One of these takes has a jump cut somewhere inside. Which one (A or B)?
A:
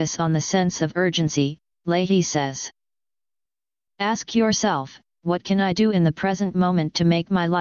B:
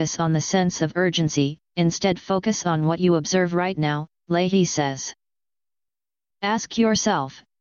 A